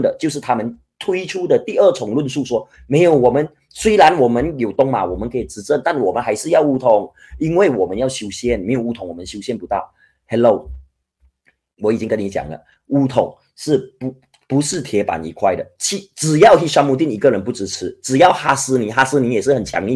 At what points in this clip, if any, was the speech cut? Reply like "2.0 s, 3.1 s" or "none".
none